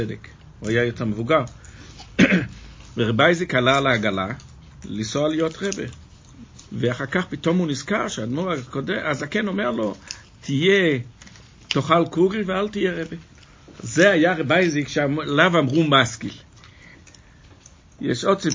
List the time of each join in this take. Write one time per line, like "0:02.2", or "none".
0:06.7
0:13.7